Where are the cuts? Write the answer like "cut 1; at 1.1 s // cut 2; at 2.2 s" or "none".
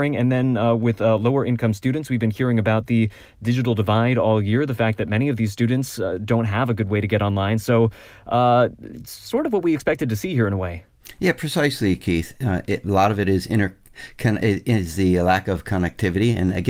cut 1; at 7.6 s